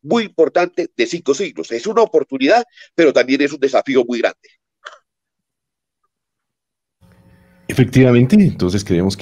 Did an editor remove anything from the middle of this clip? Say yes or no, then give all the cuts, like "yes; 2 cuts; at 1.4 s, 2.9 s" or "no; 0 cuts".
no; 0 cuts